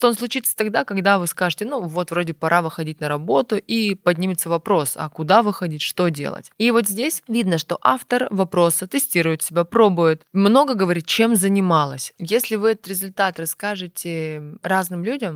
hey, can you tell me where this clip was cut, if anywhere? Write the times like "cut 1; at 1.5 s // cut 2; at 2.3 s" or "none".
cut 1; at 12.1 s